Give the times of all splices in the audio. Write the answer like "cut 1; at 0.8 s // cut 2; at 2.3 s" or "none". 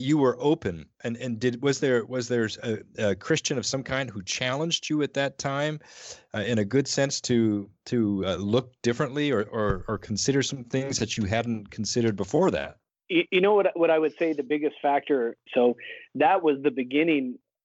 cut 1; at 15.5 s